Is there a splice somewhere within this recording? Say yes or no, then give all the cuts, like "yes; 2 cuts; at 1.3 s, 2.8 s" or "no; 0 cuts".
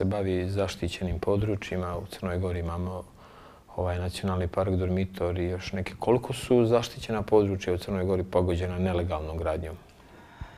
no; 0 cuts